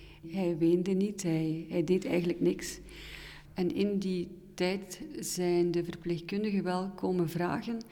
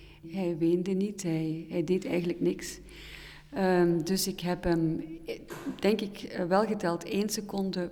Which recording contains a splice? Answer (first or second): first